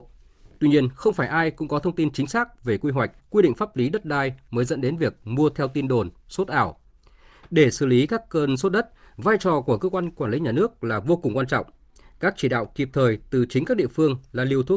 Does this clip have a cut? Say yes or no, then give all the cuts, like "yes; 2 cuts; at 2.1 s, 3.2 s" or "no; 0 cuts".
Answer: yes; 1 cut; at 3.2 s